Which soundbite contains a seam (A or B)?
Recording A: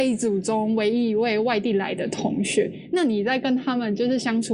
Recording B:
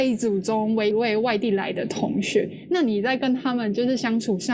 B